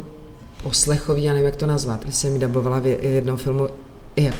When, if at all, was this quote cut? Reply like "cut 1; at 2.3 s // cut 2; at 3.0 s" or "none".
cut 1; at 2.0 s